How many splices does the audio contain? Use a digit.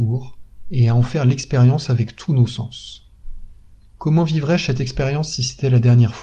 1